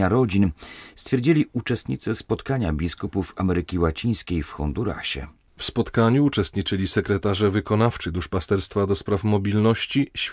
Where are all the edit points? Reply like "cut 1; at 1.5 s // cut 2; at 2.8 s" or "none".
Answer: none

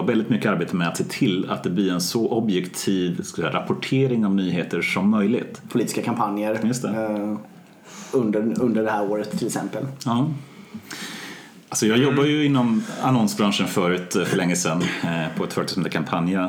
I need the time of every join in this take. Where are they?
cut 1; at 5.7 s

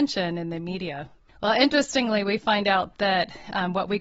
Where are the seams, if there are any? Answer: cut 1; at 1.3 s

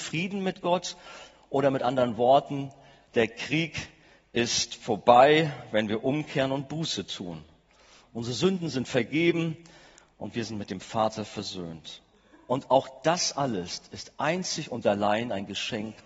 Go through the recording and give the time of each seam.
none

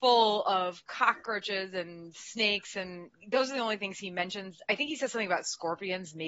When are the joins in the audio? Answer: none

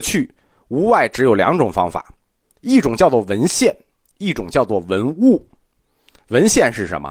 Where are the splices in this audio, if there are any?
none

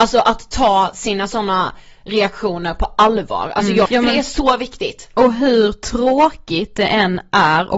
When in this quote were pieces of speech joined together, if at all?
cut 1; at 3.9 s

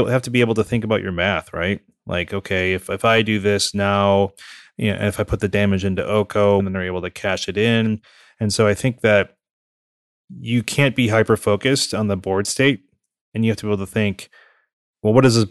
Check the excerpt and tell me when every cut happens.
cut 1; at 6.6 s

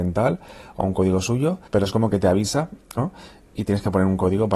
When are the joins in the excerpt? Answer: cut 1; at 1.7 s // cut 2; at 3.0 s

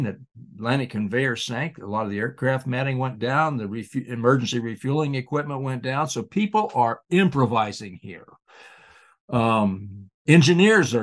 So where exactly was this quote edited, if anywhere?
none

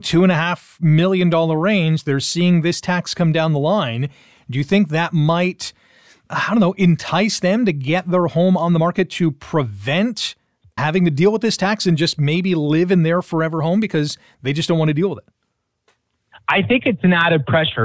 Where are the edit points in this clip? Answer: cut 1; at 10.8 s

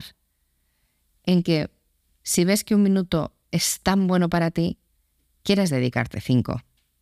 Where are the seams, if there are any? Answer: none

